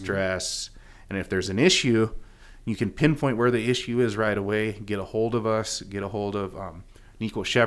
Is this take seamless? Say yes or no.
yes